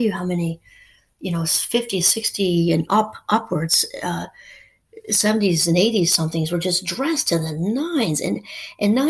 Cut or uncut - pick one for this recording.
uncut